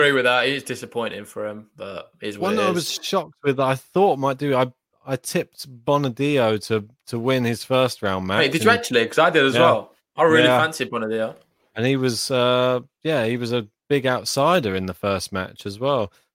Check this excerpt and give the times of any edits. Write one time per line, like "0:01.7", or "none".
none